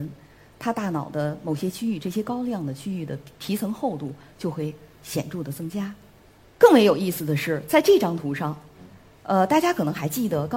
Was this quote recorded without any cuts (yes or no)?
yes